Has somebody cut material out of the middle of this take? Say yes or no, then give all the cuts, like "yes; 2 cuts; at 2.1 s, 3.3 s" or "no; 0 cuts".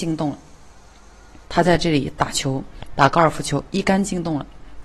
yes; 1 cut; at 1.4 s